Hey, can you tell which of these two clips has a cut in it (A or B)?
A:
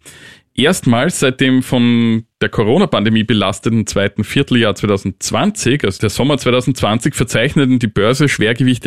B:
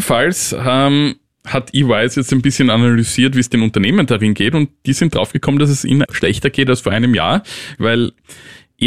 B